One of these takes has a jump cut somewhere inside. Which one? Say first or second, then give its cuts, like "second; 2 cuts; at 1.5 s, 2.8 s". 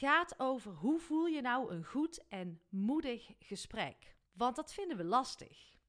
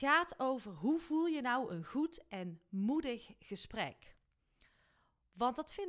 first; 1 cut; at 4.3 s